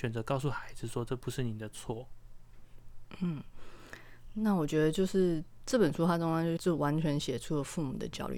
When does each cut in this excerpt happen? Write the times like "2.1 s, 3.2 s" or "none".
6.6 s